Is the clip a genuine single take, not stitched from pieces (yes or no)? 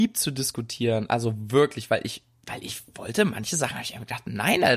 yes